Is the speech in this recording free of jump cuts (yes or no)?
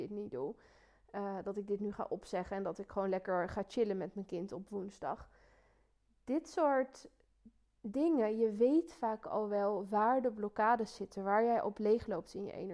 yes